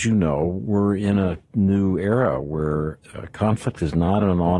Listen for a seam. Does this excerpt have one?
yes; 1 cut; at 3.0 s

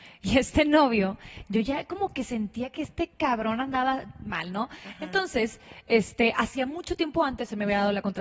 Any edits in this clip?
no; 0 cuts

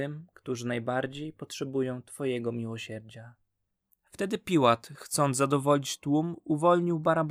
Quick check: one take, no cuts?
no; 1 cut; at 3.9 s

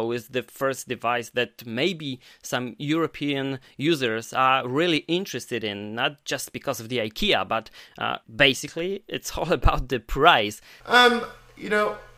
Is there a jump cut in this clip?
yes; 2 cuts; at 8.2 s, 10.8 s

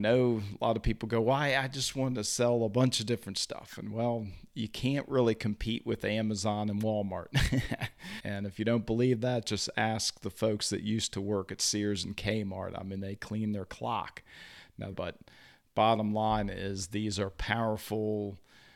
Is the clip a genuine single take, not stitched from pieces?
no; 2 cuts; at 8.2 s, 14.9 s

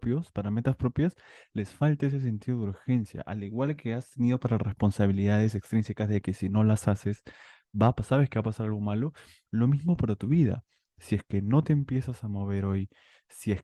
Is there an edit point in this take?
no; 0 cuts

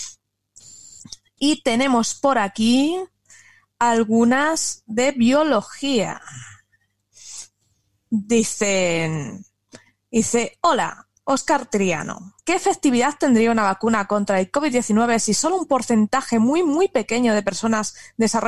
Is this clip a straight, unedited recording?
yes; 0 cuts

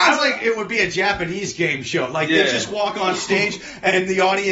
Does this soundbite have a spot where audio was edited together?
no; 0 cuts

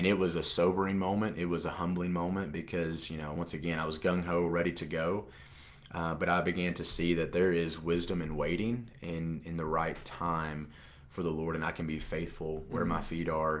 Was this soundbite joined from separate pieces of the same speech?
no; 0 cuts

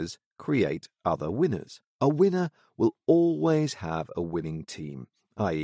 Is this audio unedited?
no; 1 cut; at 1.9 s

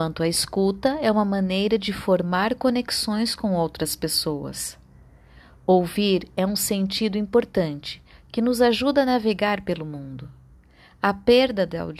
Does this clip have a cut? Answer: no; 0 cuts

